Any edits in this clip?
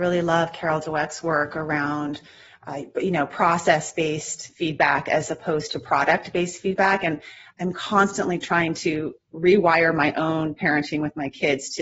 no; 0 cuts

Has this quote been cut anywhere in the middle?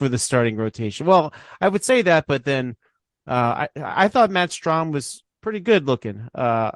no; 0 cuts

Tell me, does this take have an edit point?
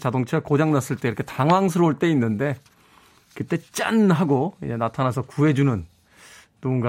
no; 0 cuts

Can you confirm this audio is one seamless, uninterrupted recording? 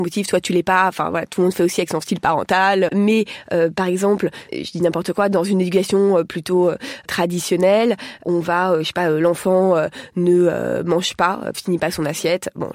no; 2 cuts; at 2.9 s, 11.5 s

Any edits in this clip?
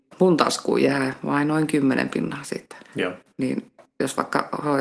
yes; 1 cut; at 2.8 s

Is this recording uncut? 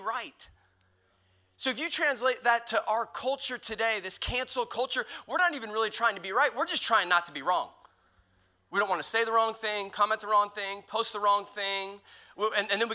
yes; 0 cuts

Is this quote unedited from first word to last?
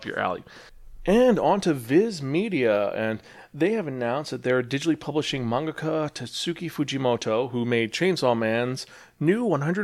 yes; 0 cuts

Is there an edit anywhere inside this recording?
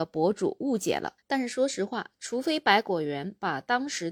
yes; 1 cut; at 1.2 s

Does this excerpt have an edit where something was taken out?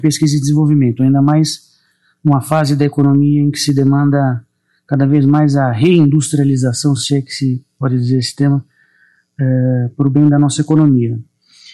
no; 0 cuts

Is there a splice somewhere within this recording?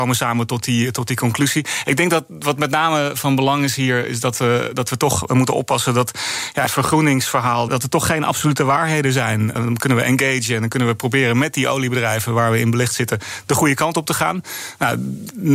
yes; 3 cuts; at 6.7 s, 7.7 s, 9.6 s

